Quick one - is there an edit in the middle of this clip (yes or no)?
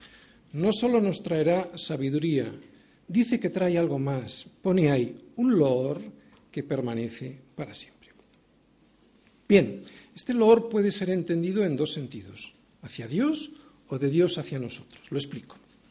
no